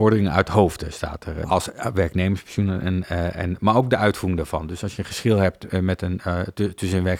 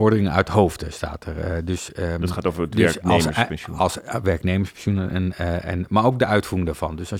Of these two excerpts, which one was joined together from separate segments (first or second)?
first